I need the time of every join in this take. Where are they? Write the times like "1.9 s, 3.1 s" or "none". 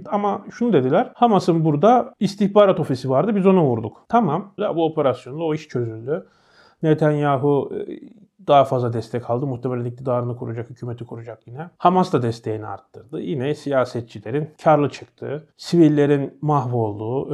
4.6 s